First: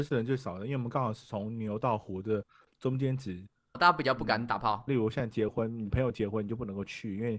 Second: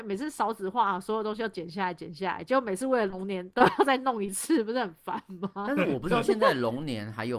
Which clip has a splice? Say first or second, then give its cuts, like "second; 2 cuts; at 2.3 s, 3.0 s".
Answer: first; 2 cuts; at 3.7 s, 4.9 s